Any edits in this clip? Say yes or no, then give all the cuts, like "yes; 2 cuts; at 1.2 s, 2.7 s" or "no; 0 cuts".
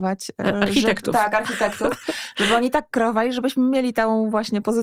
no; 0 cuts